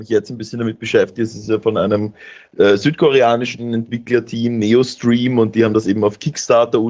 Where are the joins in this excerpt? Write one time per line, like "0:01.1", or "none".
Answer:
none